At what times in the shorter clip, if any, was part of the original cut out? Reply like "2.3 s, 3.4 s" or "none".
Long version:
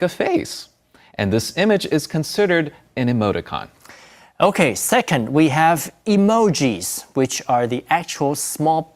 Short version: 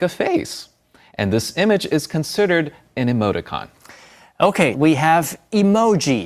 4.7 s